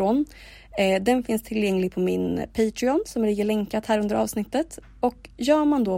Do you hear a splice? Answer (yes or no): yes